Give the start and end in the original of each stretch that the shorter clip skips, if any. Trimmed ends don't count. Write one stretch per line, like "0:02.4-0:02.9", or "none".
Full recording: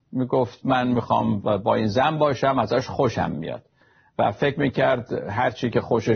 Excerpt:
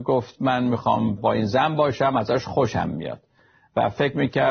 0:01.4-0:01.6